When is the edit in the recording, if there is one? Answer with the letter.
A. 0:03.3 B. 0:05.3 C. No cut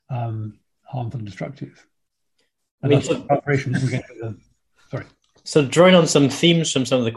C